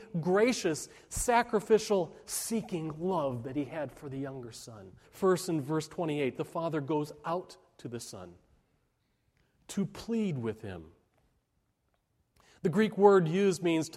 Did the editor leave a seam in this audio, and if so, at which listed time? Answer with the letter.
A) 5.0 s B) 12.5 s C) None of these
A